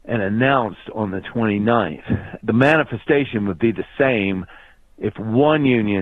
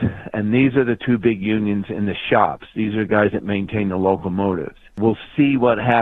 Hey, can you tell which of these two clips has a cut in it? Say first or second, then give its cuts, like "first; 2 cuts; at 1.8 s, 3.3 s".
first; 1 cut; at 2.4 s